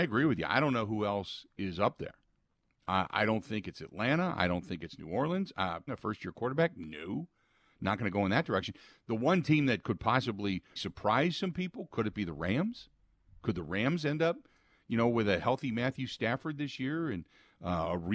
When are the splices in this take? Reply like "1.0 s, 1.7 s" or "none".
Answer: 5.9 s, 10.8 s